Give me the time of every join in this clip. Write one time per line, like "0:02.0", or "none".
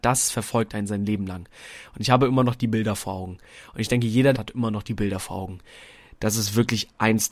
0:04.3

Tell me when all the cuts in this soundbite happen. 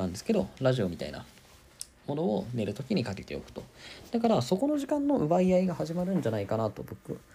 none

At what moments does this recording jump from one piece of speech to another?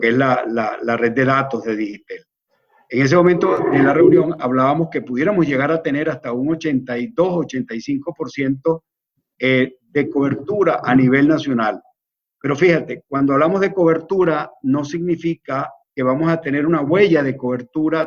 none

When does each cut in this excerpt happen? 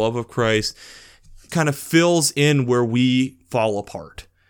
0:01.5

